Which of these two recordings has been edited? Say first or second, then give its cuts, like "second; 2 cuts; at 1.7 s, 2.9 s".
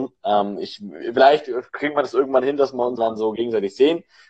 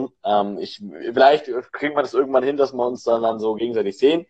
first; 1 cut; at 3.0 s